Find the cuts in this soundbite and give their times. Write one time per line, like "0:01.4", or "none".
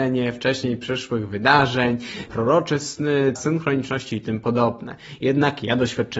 0:02.3
0:03.4